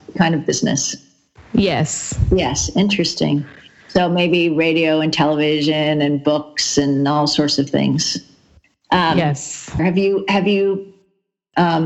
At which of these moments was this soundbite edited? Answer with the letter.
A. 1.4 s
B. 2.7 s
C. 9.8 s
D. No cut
C